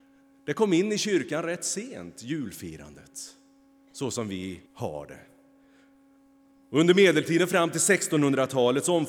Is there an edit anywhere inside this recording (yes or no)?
yes